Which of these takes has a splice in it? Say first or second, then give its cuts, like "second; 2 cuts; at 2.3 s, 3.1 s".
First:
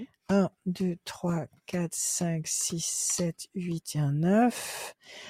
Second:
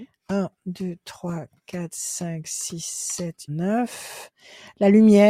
second; 1 cut; at 3.5 s